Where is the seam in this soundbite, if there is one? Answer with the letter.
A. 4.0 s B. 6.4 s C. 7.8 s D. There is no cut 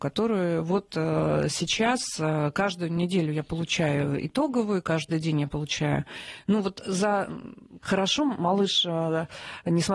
C